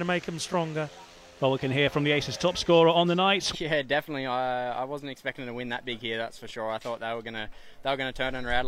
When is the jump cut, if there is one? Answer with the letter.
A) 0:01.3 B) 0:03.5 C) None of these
B